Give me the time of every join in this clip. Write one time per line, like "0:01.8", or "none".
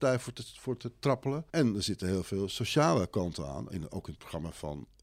0:01.5